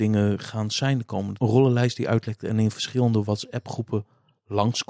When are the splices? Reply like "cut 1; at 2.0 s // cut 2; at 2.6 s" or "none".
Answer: none

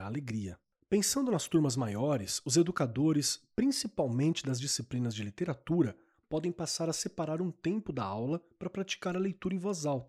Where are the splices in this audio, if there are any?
none

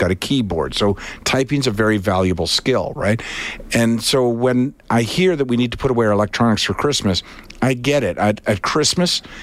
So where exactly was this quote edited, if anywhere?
none

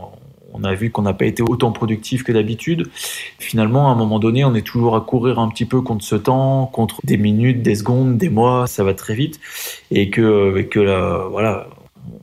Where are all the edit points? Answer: cut 1; at 7.0 s // cut 2; at 8.2 s

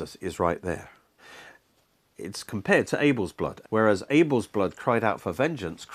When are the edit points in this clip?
cut 1; at 3.6 s

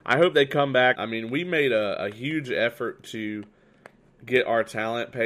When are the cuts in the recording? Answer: cut 1; at 0.9 s

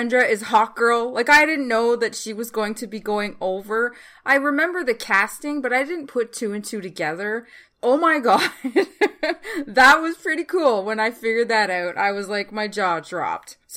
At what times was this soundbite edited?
none

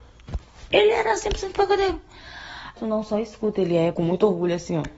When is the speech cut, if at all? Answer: cut 1; at 2.8 s // cut 2; at 3.9 s

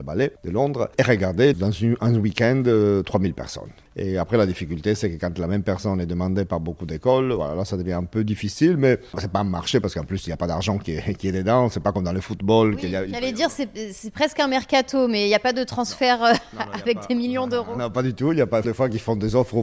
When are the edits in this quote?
cut 1; at 18.6 s

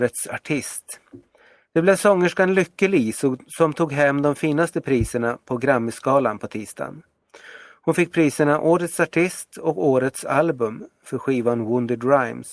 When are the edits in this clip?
none

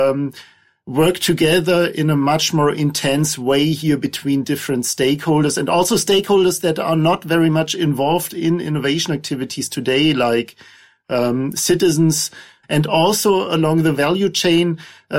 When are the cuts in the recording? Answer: cut 1; at 12.6 s

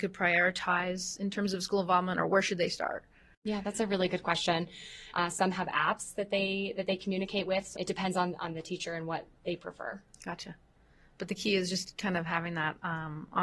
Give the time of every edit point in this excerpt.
cut 1; at 5.1 s // cut 2; at 7.7 s

